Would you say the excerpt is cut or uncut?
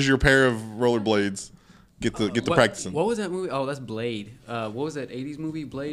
uncut